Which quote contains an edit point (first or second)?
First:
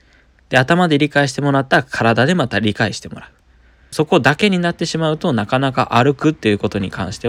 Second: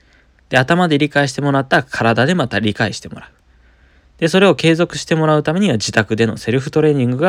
first